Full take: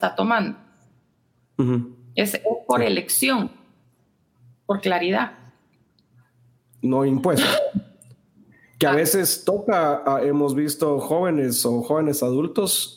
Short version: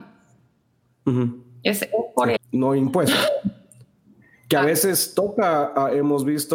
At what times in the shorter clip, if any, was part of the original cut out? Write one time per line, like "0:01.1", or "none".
0:02.4